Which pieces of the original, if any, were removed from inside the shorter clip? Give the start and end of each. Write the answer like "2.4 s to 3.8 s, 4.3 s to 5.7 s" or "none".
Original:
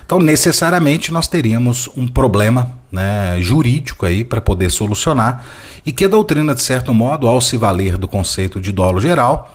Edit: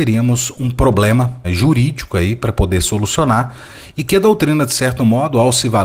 2.8 s to 3.3 s